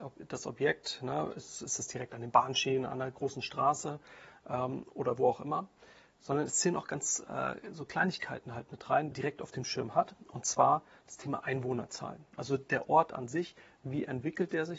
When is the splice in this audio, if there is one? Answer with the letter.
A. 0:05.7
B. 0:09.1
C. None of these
B